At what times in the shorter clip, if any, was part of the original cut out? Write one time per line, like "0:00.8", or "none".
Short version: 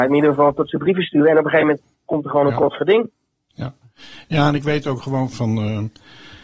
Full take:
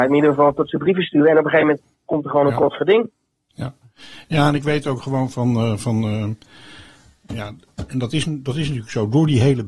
0:05.3